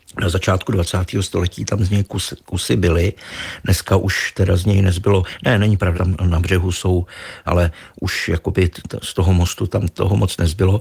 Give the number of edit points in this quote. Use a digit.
2